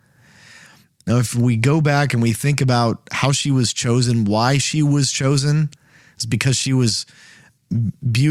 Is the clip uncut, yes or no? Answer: no